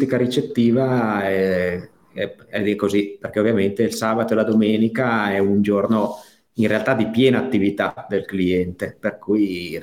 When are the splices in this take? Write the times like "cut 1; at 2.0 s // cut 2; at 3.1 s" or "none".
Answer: none